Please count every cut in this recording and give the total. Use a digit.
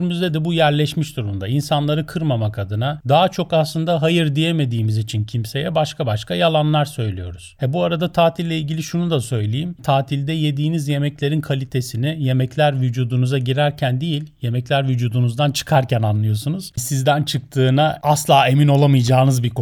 1